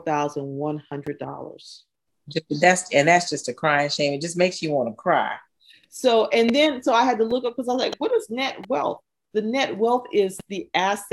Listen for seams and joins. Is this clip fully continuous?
yes; 0 cuts

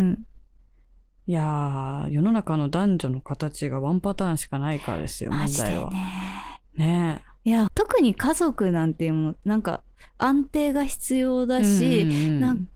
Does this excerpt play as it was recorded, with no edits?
no; 2 cuts; at 6.6 s, 7.7 s

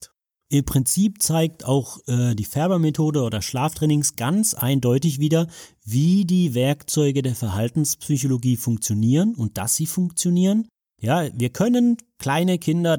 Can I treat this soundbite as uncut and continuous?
yes; 0 cuts

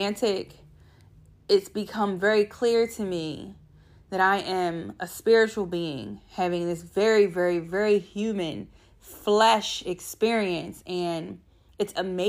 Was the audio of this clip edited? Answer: no; 0 cuts

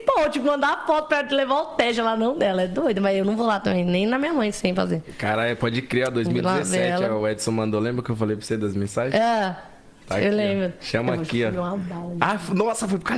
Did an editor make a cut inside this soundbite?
no; 0 cuts

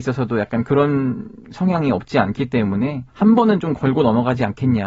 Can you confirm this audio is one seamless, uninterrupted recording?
no; 1 cut; at 3.1 s

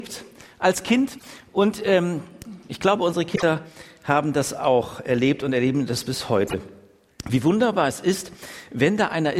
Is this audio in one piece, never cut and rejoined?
yes; 0 cuts

